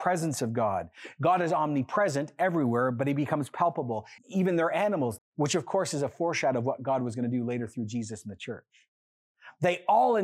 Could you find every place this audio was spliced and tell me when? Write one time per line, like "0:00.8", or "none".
0:04.2
0:05.2